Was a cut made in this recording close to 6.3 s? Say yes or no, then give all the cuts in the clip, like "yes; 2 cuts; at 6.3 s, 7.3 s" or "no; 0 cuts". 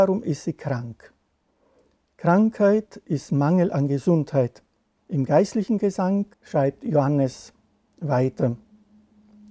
yes; 2 cuts; at 5.0 s, 6.3 s